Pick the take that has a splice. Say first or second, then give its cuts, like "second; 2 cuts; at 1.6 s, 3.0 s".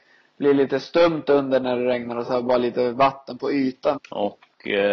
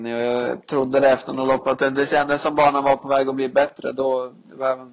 first; 1 cut; at 4.0 s